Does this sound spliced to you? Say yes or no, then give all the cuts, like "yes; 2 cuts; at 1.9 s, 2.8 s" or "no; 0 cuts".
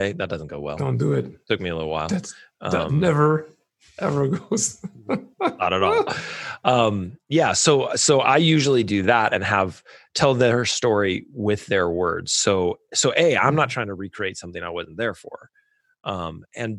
no; 0 cuts